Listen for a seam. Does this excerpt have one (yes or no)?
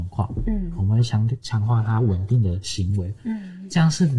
no